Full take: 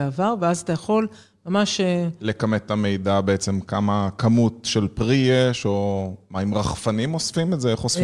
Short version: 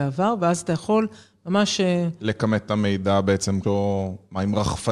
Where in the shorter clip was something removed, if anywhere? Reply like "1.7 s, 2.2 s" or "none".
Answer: 3.6 s